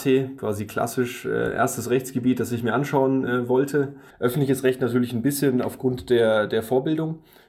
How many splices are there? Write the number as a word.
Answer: one